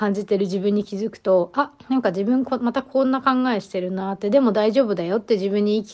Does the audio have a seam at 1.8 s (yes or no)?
yes